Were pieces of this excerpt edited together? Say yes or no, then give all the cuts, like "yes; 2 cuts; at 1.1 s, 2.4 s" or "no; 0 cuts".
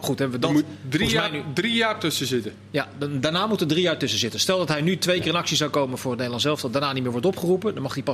no; 0 cuts